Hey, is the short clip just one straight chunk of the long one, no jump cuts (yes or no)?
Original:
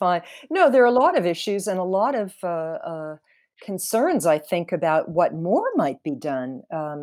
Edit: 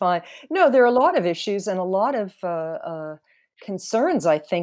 yes